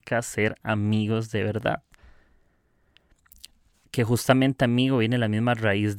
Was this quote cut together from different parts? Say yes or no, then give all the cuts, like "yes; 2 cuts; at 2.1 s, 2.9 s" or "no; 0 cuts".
no; 0 cuts